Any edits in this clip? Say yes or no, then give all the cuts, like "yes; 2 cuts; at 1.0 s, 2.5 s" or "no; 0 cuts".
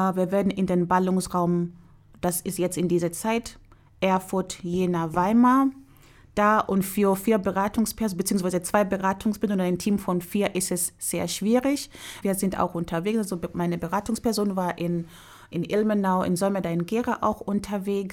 yes; 2 cuts; at 12.2 s, 15.5 s